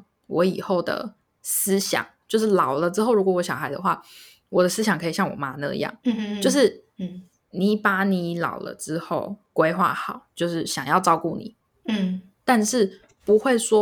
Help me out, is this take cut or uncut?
cut